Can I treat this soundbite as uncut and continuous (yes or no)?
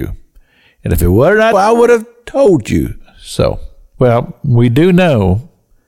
no